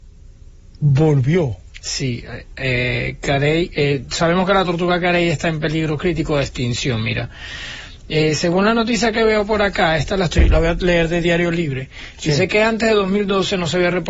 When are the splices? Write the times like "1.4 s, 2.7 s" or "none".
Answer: none